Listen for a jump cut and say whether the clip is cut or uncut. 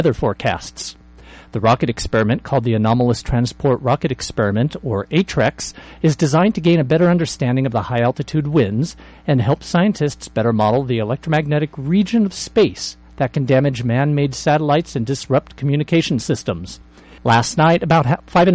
cut